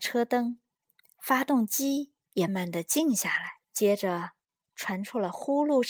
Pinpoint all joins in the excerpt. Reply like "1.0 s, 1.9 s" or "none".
2.5 s, 3.6 s

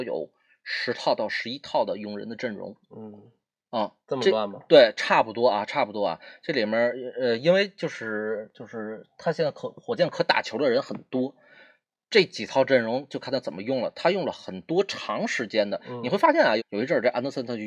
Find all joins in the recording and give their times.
16.6 s

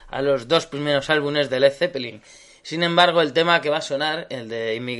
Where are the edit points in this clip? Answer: none

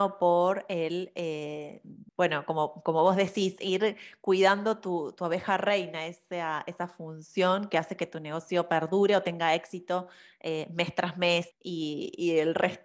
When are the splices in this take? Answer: 2.1 s, 11.5 s

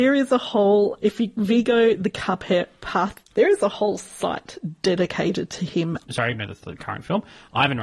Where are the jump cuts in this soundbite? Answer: 3.3 s, 6.0 s

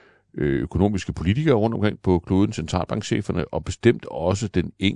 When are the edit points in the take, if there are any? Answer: none

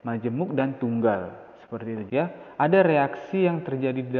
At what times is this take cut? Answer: 2.1 s

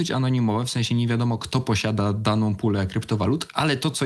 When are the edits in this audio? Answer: none

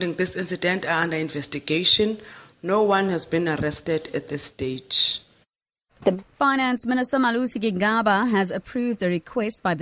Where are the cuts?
6.3 s

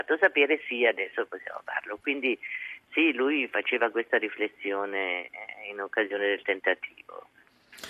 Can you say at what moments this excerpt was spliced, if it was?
none

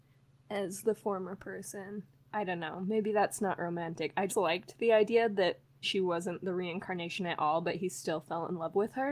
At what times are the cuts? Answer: 4.3 s, 5.8 s

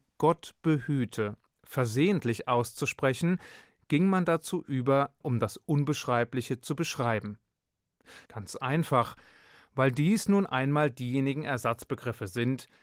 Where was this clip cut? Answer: 5.2 s, 8.2 s

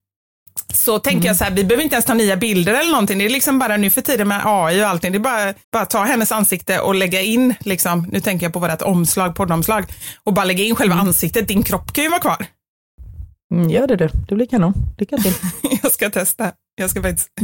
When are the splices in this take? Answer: 5.6 s

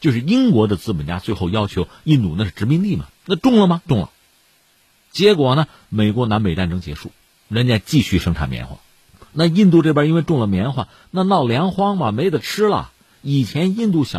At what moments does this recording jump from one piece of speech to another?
3.1 s

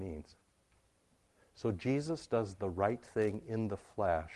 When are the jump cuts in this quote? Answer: none

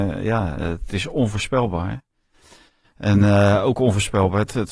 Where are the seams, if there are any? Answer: none

